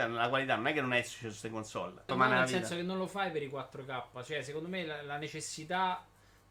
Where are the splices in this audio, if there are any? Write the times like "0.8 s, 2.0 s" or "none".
2.1 s